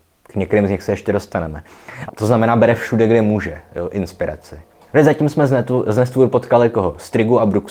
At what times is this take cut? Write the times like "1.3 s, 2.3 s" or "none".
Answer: 2.1 s